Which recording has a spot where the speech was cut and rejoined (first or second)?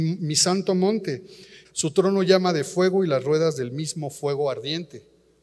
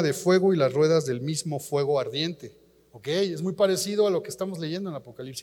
first